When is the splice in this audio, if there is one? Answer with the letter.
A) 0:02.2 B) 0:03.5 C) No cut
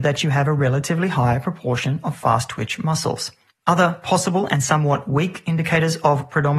B